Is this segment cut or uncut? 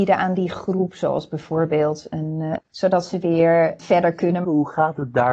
cut